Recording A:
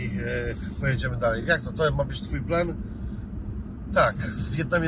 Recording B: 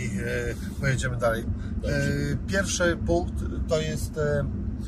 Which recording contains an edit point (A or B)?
B